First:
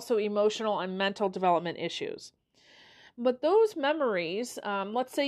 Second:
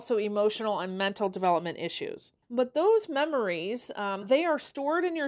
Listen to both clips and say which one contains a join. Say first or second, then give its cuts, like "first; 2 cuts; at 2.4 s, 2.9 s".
second; 2 cuts; at 2.4 s, 4.2 s